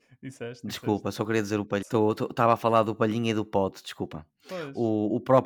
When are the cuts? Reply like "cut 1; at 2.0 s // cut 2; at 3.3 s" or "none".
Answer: cut 1; at 1.8 s